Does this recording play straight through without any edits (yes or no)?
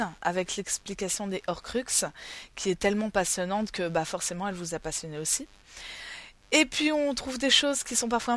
yes